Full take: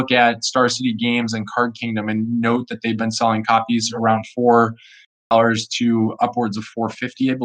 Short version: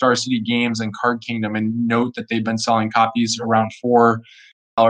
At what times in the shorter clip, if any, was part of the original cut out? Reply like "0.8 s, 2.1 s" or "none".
none

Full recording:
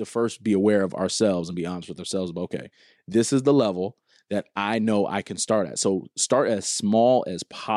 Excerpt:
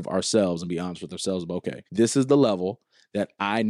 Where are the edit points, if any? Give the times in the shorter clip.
1.9 s

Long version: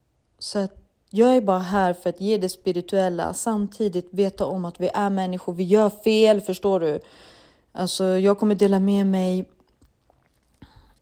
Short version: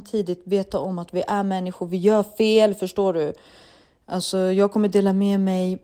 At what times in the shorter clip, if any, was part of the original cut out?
none

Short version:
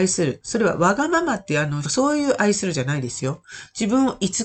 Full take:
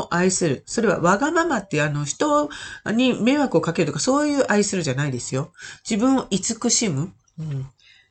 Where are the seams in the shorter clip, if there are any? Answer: 1.8 s

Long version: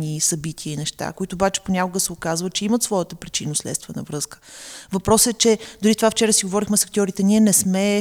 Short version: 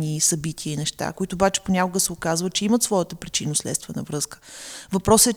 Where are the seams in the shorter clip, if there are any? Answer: none

